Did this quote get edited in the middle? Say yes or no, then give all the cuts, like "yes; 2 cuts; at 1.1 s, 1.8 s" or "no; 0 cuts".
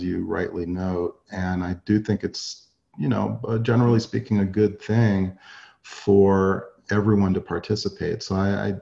no; 0 cuts